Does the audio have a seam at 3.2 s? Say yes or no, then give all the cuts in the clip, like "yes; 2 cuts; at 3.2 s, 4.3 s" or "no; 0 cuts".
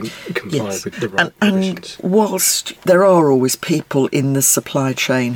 no; 1 cut; at 0.9 s